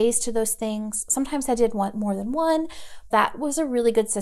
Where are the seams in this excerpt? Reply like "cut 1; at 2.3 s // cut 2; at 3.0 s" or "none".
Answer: cut 1; at 3.1 s